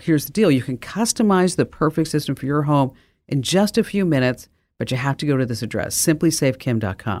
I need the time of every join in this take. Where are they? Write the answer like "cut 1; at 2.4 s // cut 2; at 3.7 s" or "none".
none